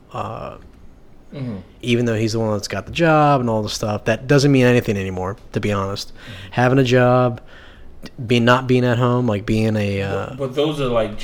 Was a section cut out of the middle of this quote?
yes; 1 cut; at 1.3 s

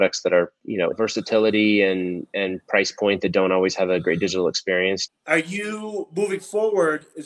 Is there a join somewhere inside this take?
yes; 2 cuts; at 0.9 s, 5.1 s

